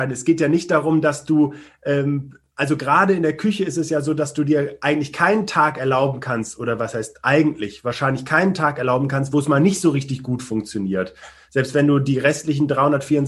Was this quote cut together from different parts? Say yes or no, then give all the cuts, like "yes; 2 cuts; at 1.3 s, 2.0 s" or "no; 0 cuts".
no; 0 cuts